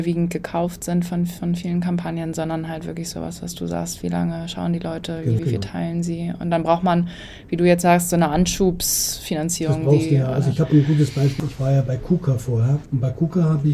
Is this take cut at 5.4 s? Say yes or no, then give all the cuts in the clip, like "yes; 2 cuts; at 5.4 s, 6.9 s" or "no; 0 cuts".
yes; 1 cut; at 5.4 s